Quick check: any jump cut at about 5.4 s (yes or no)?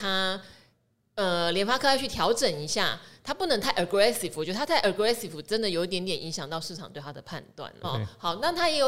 no